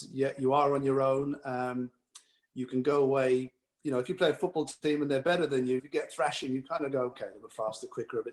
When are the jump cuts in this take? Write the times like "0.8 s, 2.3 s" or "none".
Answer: 5.8 s, 7.1 s

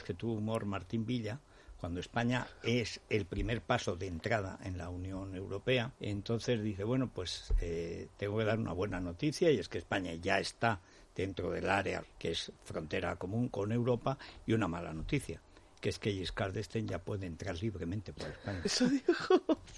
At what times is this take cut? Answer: 6.0 s, 12.0 s

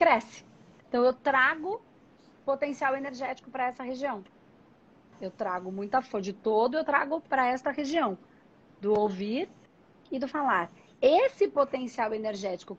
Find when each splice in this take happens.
none

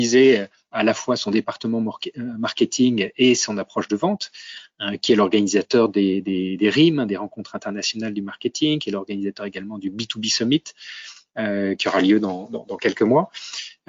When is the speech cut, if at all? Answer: none

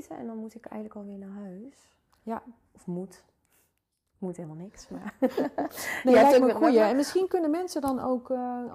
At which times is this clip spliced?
none

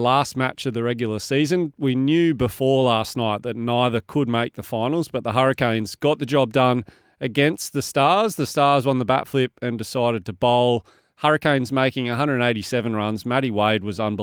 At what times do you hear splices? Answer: none

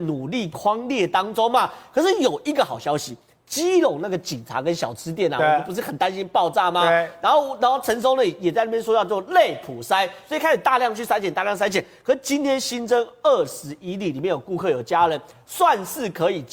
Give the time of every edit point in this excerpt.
none

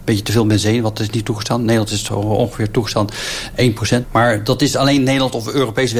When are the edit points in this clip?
4.0 s

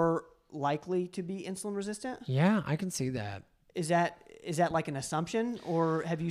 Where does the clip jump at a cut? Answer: none

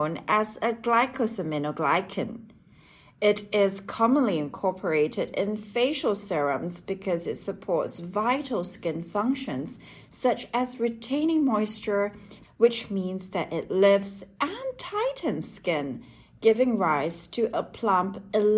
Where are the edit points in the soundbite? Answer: 12.4 s

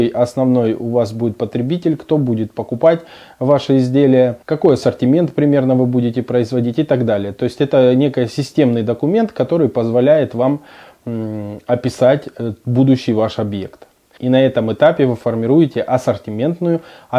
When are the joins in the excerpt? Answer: 4.4 s, 14.2 s

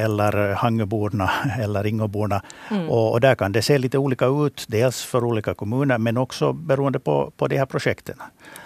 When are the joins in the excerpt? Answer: none

